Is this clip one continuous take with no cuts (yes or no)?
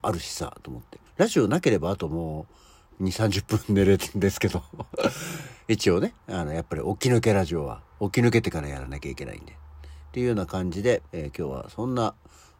no